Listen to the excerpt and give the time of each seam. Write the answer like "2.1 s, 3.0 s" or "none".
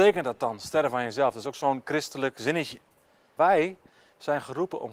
3.4 s